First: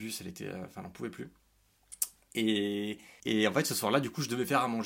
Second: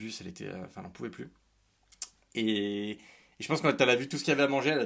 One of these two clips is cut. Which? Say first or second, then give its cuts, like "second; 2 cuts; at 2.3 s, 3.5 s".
first; 1 cut; at 3.2 s